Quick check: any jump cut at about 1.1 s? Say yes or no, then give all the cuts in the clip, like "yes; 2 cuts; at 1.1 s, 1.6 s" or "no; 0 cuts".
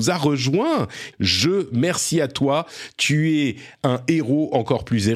yes; 1 cut; at 1.1 s